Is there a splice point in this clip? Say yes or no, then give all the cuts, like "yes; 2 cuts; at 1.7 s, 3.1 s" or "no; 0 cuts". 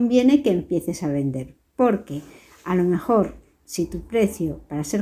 no; 0 cuts